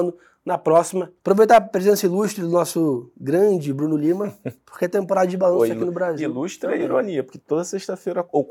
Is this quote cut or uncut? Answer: cut